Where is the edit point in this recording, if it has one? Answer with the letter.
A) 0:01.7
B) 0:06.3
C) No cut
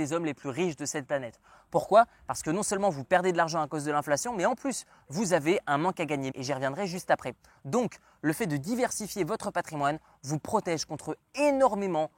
B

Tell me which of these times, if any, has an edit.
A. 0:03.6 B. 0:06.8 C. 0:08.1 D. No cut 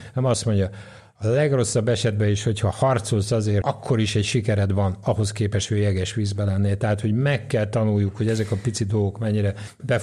A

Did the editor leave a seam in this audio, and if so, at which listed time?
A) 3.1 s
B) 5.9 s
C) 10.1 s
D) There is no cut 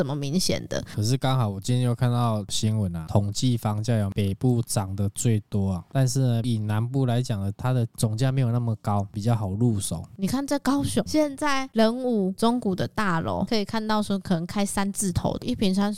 D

